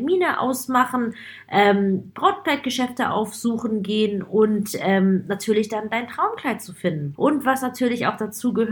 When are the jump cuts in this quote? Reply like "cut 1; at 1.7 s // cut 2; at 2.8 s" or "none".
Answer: cut 1; at 7.2 s